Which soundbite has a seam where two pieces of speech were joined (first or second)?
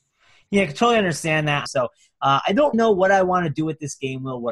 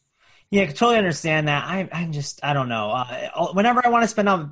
first